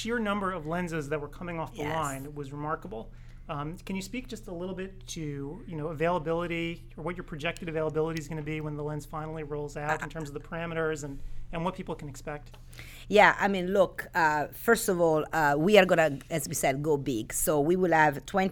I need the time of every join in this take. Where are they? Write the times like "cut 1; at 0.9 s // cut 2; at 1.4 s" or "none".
none

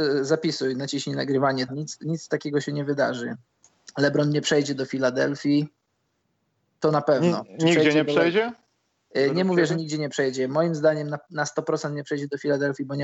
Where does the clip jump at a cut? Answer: cut 1; at 1.7 s

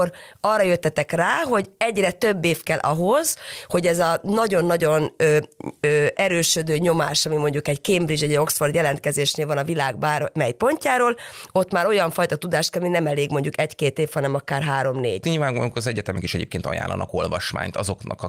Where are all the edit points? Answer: cut 1; at 15.2 s

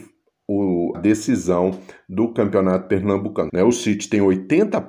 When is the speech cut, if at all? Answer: cut 1; at 0.9 s // cut 2; at 3.5 s

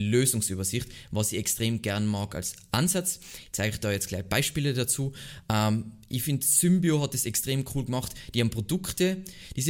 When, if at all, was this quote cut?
none

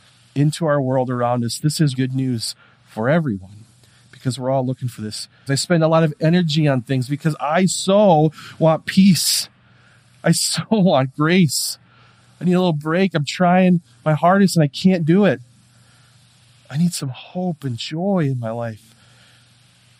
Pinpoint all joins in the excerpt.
cut 1; at 1.9 s // cut 2; at 5.5 s

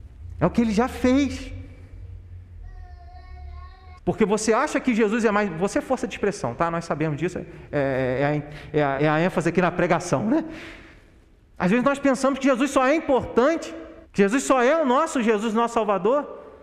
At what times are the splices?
cut 1; at 4.0 s // cut 2; at 9.0 s // cut 3; at 14.0 s

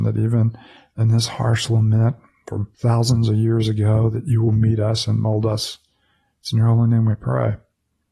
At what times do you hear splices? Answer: cut 1; at 2.7 s

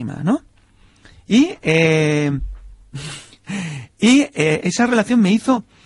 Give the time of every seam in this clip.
cut 1; at 4.6 s

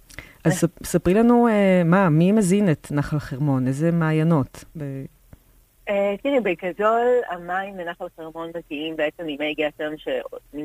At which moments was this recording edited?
cut 1; at 4.8 s

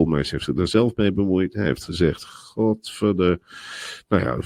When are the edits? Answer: none

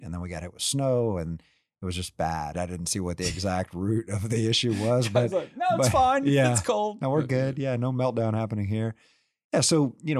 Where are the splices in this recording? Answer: cut 1; at 2.5 s

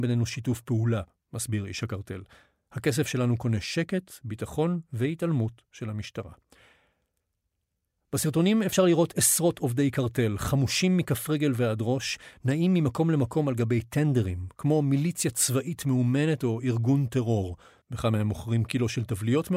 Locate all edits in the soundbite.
cut 1; at 17.8 s

